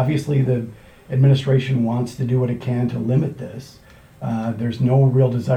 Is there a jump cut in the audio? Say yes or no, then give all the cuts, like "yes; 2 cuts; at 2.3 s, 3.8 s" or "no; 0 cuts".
no; 0 cuts